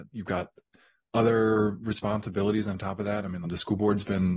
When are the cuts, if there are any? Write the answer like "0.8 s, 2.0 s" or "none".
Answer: 3.4 s